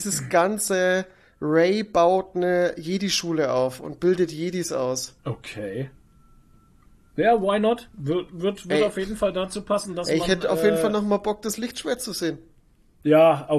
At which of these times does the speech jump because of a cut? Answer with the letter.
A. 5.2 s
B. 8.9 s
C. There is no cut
A